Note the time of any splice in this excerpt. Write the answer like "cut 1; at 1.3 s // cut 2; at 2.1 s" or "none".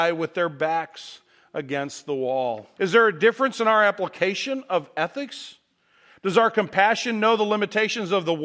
cut 1; at 2.8 s